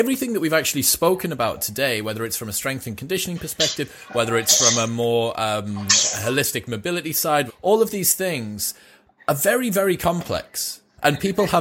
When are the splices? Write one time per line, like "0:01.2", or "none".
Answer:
0:07.5